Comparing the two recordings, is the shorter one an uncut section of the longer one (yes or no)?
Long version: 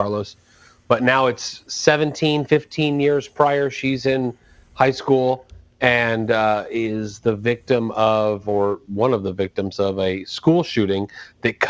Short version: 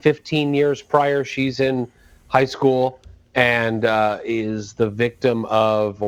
yes